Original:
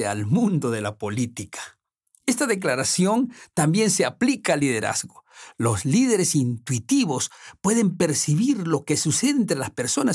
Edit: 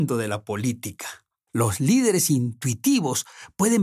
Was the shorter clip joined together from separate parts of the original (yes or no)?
yes